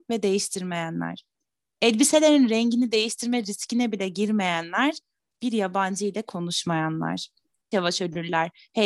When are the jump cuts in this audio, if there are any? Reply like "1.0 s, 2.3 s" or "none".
7.7 s